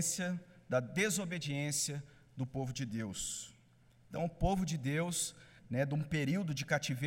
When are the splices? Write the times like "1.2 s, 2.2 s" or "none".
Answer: 5.6 s